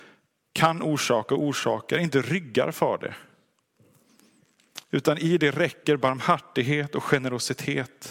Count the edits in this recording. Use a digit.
0